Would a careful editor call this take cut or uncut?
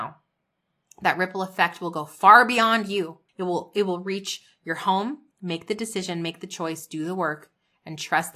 cut